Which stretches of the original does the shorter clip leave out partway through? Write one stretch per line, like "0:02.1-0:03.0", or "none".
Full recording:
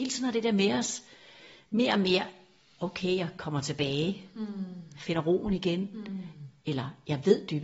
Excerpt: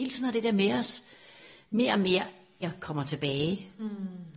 0:02.6-0:03.2